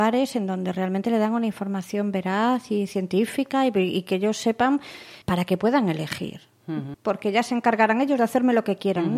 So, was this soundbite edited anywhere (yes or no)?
yes